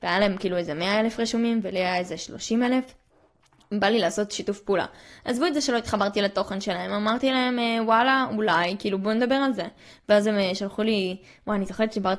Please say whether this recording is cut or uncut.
uncut